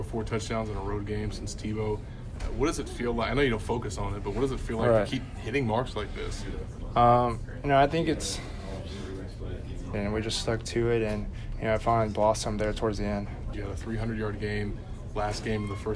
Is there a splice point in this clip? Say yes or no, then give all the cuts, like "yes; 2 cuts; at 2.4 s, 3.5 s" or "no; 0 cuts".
yes; 2 cuts; at 9.9 s, 13.5 s